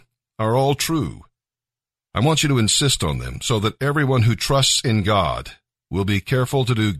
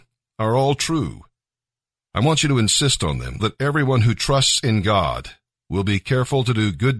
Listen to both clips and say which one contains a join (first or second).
second